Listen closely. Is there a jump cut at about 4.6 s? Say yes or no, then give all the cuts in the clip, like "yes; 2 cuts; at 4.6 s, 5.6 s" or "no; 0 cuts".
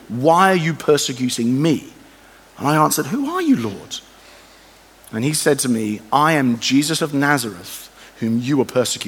no; 0 cuts